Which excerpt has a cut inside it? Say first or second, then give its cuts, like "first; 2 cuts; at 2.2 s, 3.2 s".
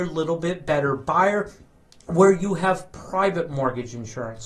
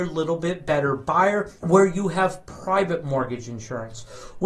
second; 1 cut; at 1.6 s